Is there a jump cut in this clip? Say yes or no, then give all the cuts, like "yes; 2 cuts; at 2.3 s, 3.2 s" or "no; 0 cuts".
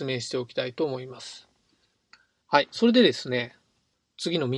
yes; 1 cut; at 2.4 s